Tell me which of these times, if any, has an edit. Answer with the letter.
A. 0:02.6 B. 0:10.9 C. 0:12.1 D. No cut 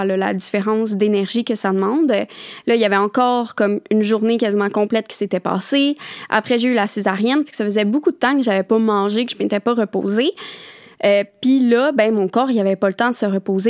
A